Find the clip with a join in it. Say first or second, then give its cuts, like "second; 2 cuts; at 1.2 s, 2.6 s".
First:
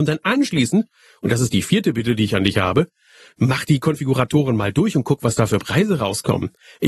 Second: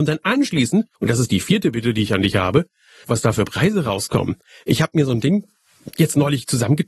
second; 2 cuts; at 0.9 s, 3.0 s